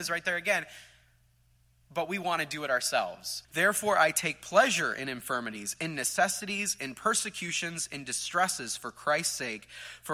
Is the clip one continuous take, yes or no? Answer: no